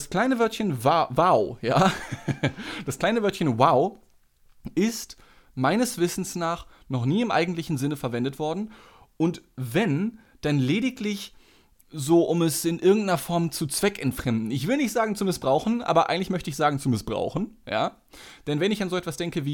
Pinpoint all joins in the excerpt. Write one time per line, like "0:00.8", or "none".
none